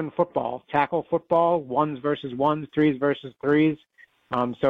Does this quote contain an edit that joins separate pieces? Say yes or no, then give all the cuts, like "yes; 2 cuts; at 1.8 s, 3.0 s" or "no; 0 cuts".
yes; 1 cut; at 2.7 s